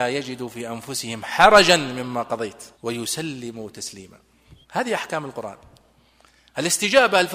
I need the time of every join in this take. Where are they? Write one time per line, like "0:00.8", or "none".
0:02.7
0:04.6